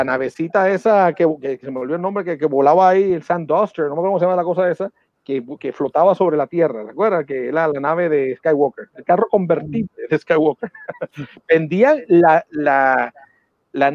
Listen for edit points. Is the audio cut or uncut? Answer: cut